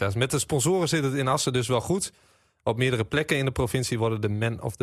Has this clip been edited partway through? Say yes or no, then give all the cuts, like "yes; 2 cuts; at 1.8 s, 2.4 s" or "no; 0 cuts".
no; 0 cuts